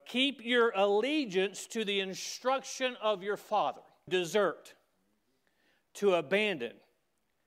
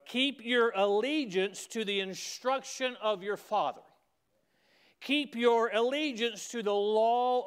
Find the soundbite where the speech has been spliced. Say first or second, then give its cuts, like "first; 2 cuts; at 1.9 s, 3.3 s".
first; 1 cut; at 4.1 s